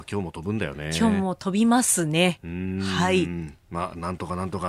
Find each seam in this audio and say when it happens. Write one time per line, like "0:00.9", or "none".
none